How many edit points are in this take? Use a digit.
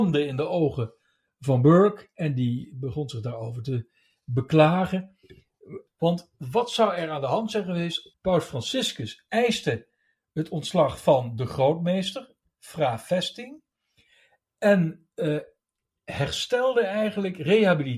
2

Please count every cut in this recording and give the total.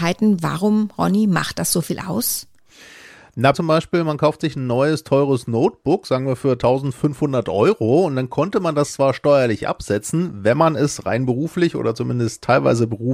1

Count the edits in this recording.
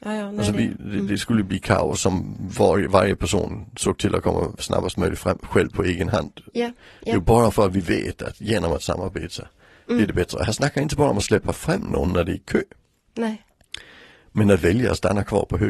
0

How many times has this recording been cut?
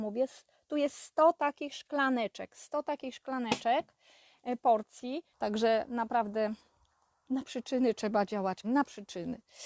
2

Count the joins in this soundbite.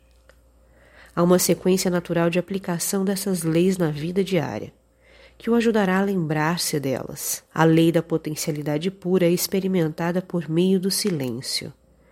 1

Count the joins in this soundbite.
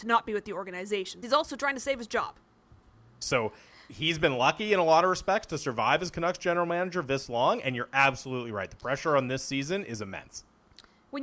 2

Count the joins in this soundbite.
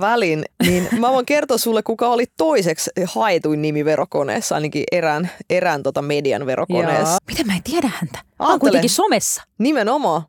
1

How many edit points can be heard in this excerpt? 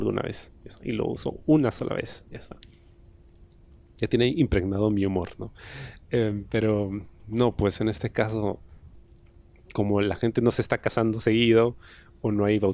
0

